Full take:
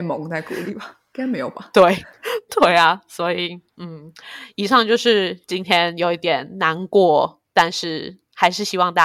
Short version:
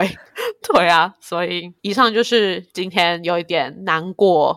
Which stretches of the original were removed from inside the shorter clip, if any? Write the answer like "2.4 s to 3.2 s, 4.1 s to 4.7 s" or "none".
3.7 s to 4.5 s